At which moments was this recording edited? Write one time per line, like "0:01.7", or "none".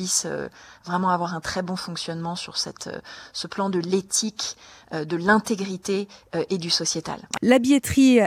0:07.4